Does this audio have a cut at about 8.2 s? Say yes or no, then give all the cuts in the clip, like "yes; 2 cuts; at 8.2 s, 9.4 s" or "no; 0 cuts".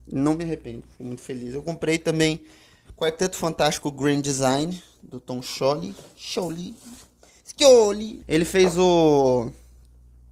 yes; 1 cut; at 8.2 s